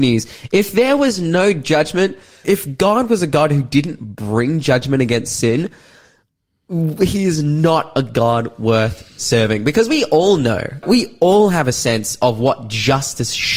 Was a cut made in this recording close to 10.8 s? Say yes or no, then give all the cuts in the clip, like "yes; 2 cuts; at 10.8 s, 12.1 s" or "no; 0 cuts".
yes; 2 cuts; at 2.4 s, 10.8 s